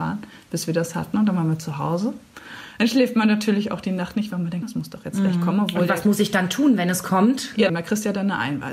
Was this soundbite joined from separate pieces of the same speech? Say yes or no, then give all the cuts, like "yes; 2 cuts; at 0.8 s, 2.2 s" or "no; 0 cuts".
yes; 2 cuts; at 4.6 s, 7.7 s